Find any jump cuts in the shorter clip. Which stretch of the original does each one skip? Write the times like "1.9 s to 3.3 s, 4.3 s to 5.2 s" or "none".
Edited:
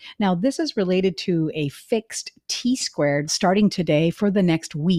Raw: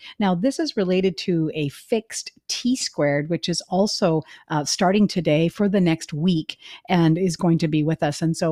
3.3 s to 4.6 s